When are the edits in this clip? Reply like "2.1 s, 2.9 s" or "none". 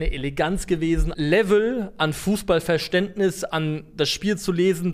1.1 s

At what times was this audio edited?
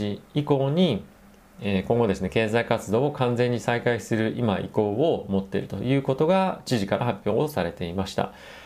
none

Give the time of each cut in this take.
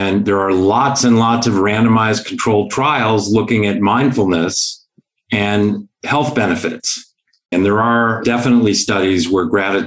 7.5 s

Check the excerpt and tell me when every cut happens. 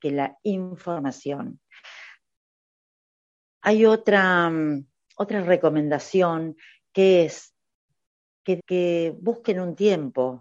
8.6 s

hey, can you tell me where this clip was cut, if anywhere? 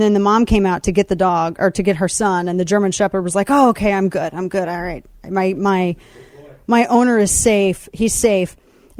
none

